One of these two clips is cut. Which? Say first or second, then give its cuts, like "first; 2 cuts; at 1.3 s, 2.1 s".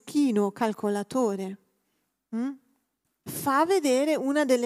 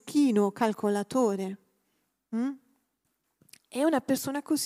first; 1 cut; at 3.3 s